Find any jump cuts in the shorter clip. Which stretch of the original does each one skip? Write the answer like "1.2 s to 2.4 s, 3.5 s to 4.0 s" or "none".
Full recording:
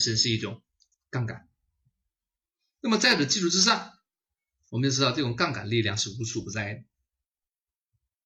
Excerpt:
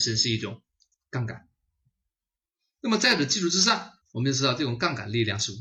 4.0 s to 4.6 s